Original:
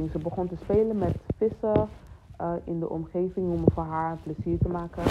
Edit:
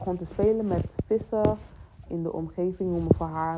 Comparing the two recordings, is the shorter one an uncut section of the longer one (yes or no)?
no